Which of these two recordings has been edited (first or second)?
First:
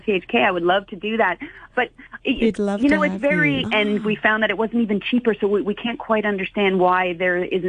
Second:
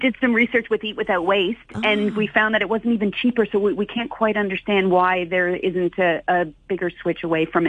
first